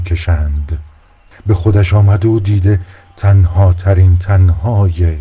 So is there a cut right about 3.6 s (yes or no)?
no